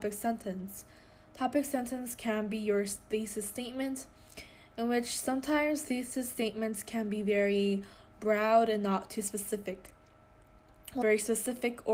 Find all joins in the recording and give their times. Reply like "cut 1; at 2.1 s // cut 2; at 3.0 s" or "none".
cut 1; at 11.0 s